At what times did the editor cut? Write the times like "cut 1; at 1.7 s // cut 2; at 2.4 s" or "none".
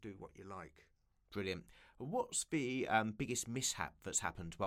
none